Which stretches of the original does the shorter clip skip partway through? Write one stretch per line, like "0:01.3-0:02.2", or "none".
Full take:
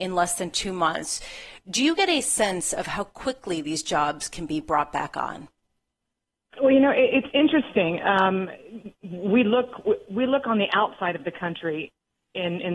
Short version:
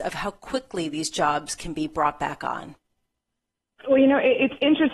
none